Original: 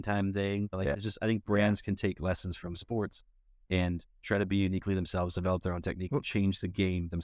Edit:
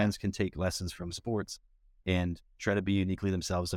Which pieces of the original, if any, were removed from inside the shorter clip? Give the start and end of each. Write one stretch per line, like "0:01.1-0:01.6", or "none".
none